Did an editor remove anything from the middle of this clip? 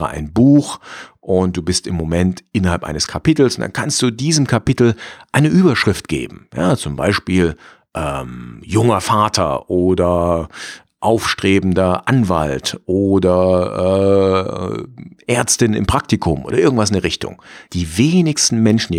yes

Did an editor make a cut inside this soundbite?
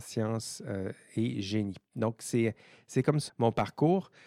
yes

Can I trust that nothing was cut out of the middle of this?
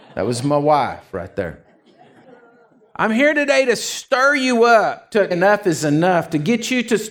no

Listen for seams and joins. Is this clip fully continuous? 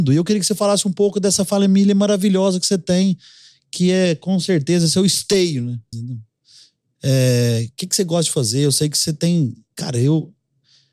no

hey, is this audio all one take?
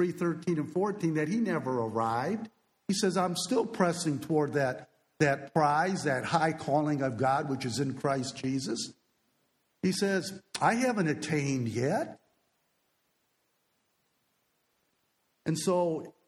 yes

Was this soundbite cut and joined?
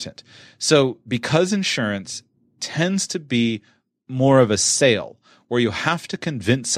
no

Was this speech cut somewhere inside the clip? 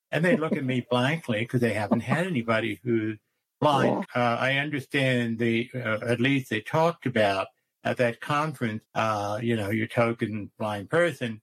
yes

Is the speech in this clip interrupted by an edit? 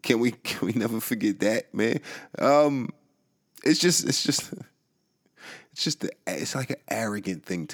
no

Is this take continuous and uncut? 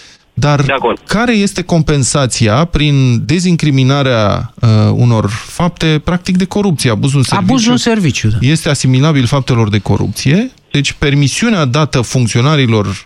yes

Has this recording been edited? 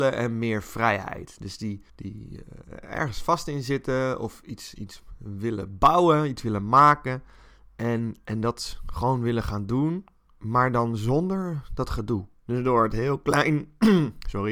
yes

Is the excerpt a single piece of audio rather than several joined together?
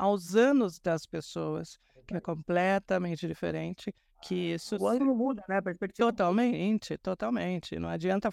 yes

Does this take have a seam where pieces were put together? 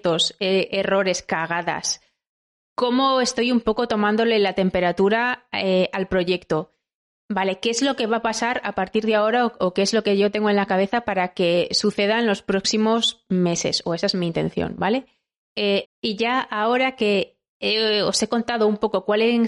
yes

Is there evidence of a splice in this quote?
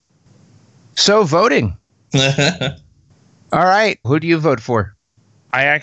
yes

